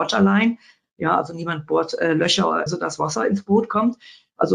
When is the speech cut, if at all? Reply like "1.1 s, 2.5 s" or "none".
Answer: 2.7 s